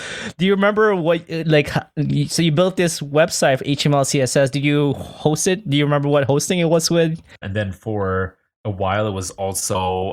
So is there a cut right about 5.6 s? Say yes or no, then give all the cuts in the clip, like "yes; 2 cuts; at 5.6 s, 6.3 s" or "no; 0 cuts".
no; 1 cut; at 7.4 s